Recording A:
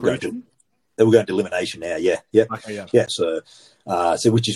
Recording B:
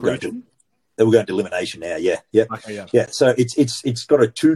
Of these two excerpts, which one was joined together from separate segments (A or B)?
A